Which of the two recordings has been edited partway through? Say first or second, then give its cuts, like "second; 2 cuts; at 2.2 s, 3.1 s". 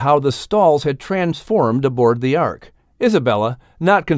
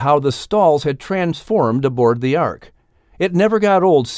first; 1 cut; at 2.9 s